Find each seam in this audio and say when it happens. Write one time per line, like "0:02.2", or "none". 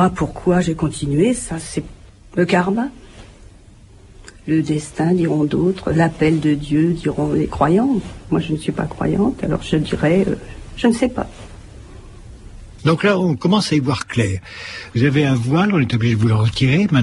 0:12.8
0:14.9